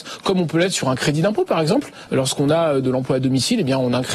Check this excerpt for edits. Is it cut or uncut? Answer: uncut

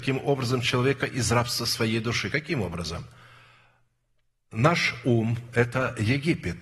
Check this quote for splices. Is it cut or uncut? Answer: uncut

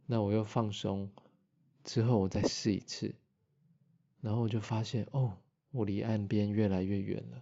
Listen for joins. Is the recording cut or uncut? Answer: uncut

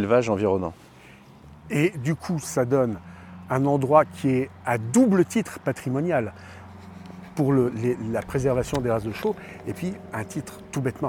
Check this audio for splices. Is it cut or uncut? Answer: uncut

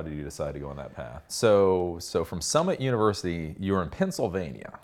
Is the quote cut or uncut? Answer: cut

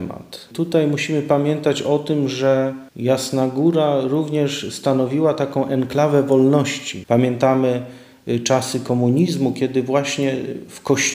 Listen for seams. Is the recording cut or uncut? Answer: cut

